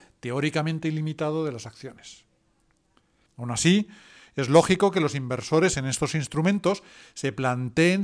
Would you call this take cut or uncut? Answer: cut